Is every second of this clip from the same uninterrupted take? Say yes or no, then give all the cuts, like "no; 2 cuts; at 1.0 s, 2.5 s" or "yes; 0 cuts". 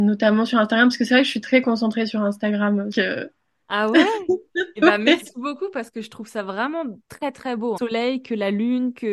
no; 2 cuts; at 2.9 s, 7.8 s